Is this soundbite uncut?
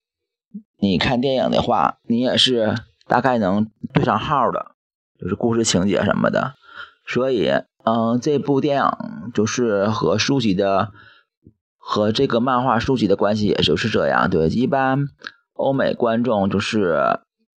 yes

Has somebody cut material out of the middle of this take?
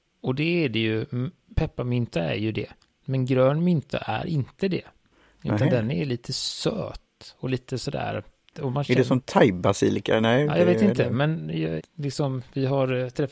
yes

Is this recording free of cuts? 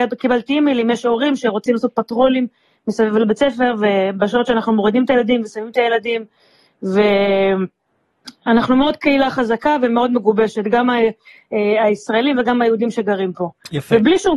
yes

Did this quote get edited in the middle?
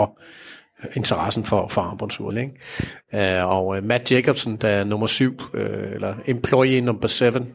yes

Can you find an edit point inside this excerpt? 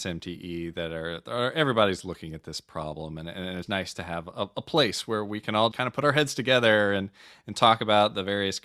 yes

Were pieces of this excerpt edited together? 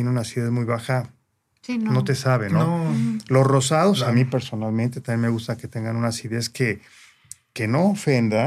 no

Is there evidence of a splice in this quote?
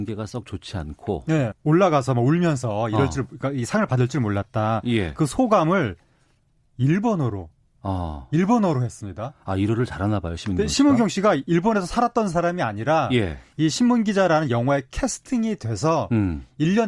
yes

